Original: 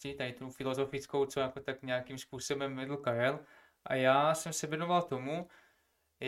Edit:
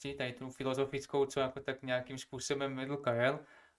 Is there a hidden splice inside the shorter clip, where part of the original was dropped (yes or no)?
no